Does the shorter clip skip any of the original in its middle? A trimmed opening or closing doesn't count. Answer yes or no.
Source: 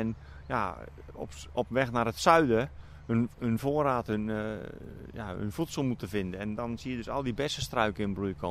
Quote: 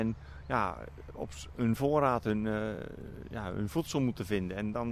yes